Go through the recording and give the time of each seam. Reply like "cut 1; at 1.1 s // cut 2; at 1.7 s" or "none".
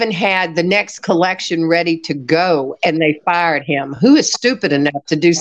none